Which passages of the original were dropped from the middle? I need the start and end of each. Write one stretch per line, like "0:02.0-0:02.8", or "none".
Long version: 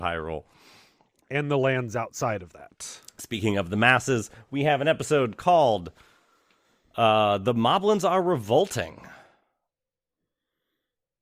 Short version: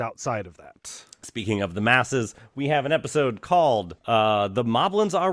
0:05.9-0:06.9